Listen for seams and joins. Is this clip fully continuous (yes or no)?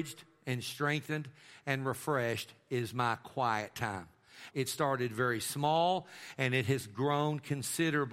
no